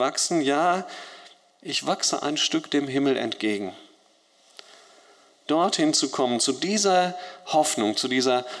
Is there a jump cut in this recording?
no; 0 cuts

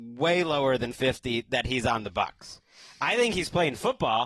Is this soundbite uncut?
no; 1 cut; at 0.9 s

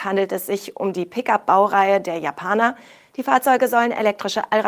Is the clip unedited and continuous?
no; 1 cut; at 3.1 s

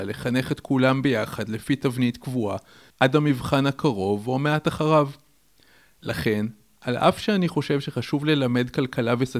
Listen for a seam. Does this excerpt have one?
yes; 1 cut; at 2.9 s

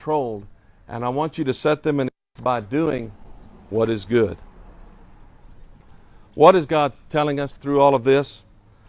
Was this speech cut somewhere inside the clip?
yes; 1 cut; at 2.4 s

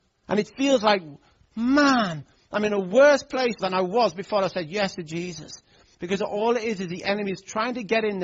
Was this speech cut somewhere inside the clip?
yes; 2 cuts; at 3.6 s, 5.9 s

